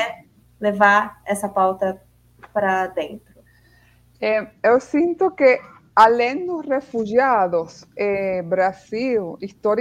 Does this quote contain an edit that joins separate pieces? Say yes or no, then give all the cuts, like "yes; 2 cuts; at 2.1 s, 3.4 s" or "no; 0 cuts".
no; 0 cuts